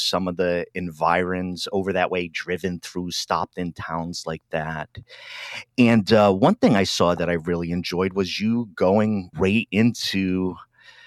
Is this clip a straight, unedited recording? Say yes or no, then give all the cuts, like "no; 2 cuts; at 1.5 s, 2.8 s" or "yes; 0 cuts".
no; 1 cut; at 9.3 s